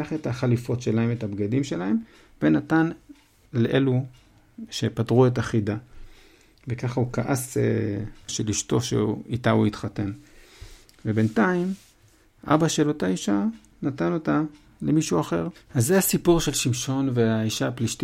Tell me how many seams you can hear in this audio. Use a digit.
2